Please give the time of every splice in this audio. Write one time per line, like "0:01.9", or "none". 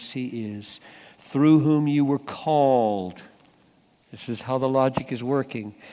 none